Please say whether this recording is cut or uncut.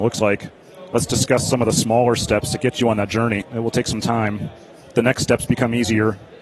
cut